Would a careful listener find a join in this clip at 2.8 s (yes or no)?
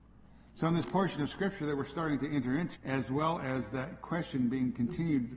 yes